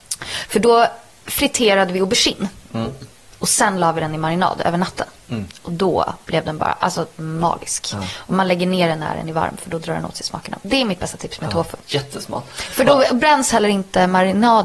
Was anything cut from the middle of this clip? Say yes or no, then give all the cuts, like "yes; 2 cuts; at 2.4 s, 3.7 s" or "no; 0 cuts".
yes; 1 cut; at 11.8 s